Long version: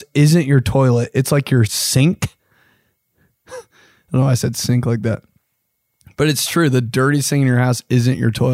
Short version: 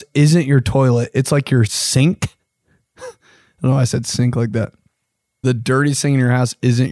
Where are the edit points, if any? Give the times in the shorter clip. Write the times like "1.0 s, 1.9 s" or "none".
2.4 s, 5.4 s